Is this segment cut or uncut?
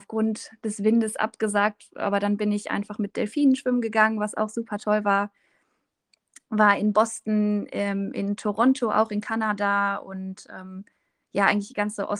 uncut